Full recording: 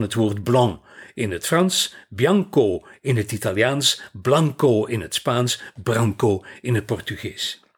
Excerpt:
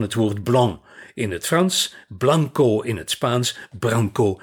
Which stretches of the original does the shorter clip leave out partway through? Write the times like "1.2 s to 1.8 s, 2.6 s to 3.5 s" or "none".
2.1 s to 4.1 s